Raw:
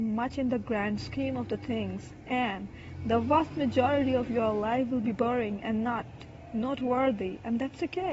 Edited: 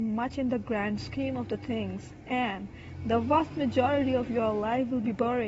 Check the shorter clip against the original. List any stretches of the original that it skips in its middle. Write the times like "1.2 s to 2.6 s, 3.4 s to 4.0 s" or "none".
none